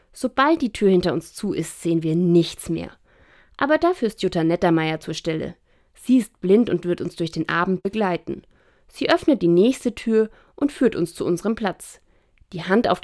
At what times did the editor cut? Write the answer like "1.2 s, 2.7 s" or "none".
none